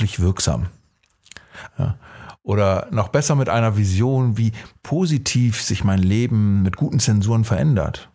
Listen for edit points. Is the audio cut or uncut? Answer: cut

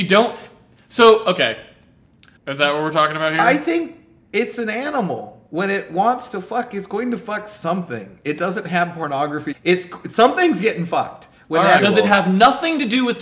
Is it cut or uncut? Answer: cut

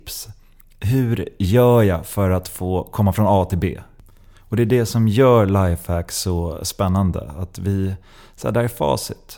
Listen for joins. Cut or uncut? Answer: uncut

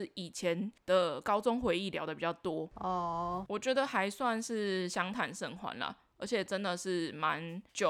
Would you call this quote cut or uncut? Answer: uncut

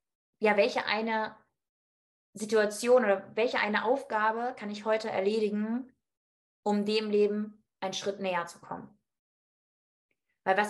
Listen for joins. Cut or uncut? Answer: uncut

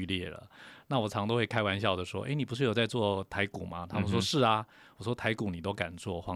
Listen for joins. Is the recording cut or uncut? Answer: uncut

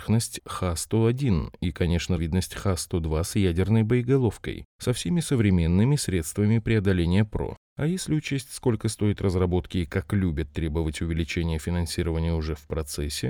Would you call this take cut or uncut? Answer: cut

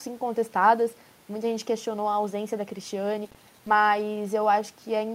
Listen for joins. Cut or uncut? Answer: uncut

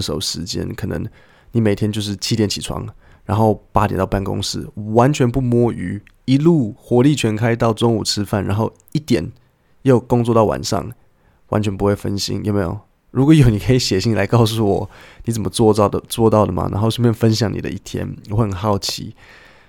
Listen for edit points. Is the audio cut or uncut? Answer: uncut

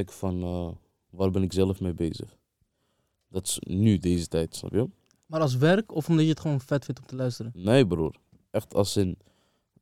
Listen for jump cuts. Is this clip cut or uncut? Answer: uncut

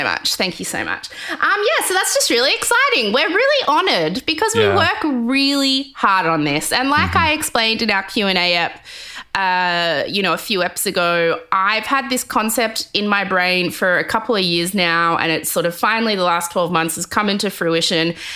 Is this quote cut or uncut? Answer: uncut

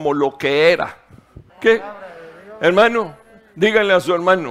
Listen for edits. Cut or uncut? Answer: cut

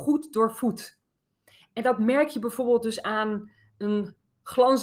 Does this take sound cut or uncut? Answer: uncut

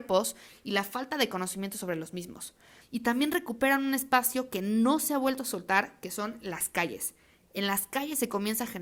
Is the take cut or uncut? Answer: cut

